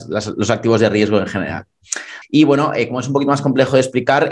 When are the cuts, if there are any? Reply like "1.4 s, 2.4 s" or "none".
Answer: 2.2 s